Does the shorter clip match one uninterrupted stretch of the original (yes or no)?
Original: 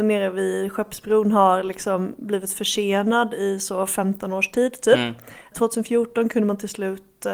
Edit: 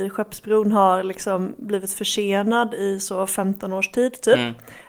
yes